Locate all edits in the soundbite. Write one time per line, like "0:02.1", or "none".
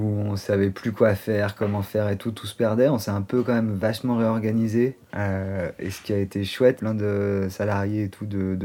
0:05.0
0:06.8